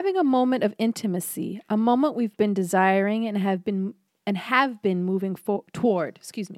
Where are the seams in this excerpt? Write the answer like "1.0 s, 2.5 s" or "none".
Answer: none